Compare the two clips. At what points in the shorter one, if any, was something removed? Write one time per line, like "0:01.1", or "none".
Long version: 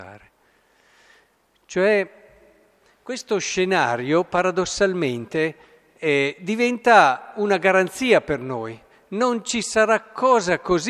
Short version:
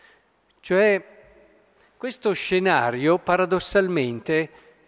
none